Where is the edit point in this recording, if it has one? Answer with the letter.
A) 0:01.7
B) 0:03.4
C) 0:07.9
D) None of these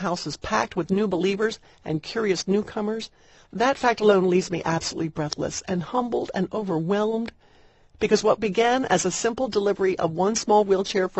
B